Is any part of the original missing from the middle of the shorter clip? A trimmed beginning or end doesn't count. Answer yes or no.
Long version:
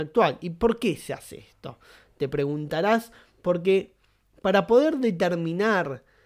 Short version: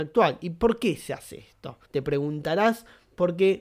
yes